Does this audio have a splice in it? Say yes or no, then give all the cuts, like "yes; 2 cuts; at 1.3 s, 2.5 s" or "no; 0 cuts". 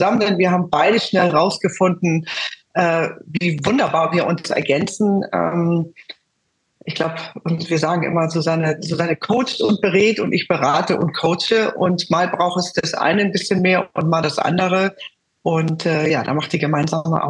no; 0 cuts